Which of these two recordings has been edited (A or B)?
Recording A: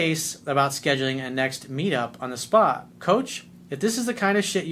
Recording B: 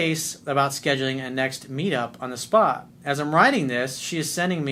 A